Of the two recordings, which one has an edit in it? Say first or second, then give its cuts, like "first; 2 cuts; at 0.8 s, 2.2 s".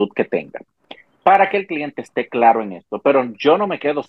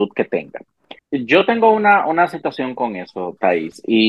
second; 1 cut; at 1.0 s